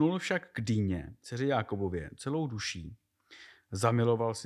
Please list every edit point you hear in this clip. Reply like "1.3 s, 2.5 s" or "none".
none

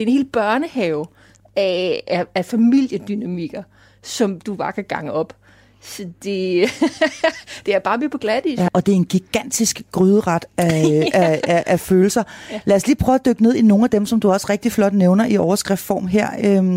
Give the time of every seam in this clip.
8.7 s

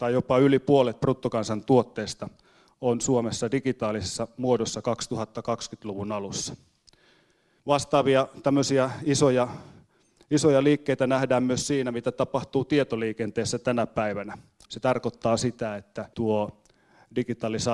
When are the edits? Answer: 14.6 s, 16.1 s

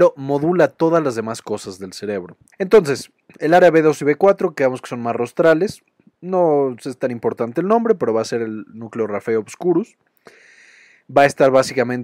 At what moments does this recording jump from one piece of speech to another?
2.5 s

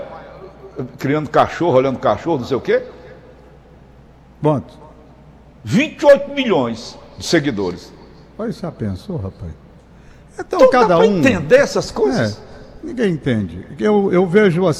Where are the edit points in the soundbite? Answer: none

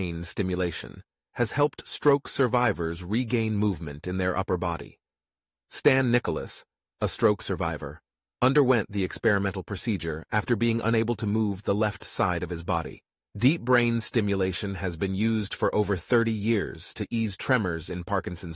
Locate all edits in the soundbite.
13.2 s

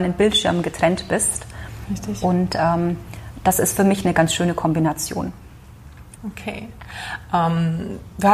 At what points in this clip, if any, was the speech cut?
6.2 s

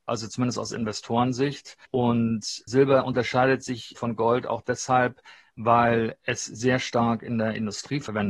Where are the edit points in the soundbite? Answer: 1.9 s

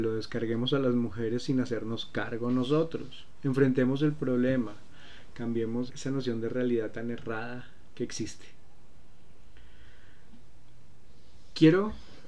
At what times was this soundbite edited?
5.9 s

